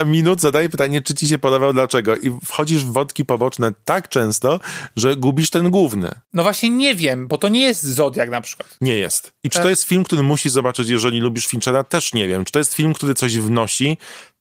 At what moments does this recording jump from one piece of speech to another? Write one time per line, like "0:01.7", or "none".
none